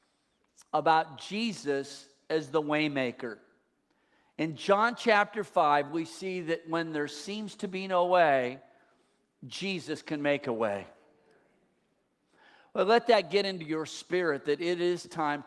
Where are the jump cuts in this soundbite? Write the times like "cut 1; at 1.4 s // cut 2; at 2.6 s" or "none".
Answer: none